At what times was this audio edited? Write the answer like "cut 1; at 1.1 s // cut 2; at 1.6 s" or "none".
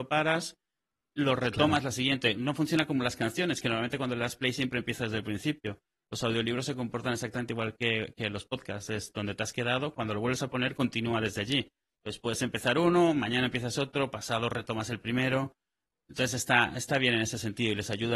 none